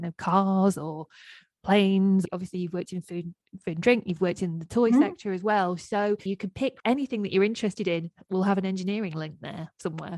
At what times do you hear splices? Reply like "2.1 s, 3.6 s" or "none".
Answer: none